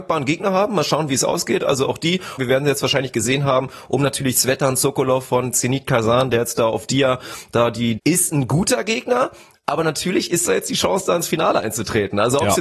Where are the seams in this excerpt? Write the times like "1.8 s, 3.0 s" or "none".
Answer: 2.4 s, 8.0 s